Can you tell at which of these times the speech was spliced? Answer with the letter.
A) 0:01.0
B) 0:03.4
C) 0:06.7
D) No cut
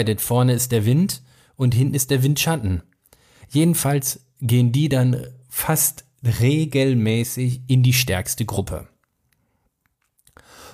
B